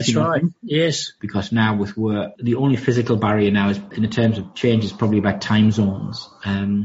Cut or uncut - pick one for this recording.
cut